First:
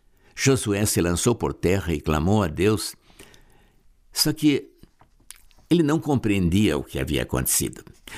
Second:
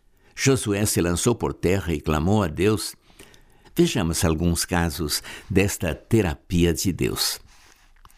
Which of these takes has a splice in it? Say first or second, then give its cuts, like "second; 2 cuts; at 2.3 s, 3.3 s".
second; 1 cut; at 3.6 s